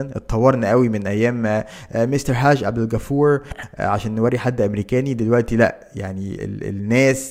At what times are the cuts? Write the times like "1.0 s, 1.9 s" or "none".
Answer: 6.4 s